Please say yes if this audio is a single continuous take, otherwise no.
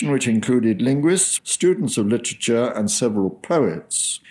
no